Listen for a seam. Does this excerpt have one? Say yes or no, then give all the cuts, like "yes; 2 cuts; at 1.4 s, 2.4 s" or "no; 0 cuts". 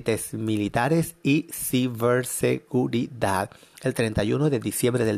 no; 0 cuts